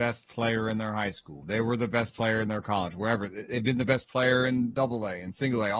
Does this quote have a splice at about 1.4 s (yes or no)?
no